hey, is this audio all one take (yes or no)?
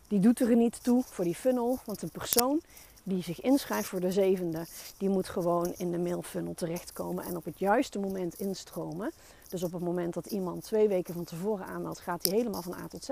yes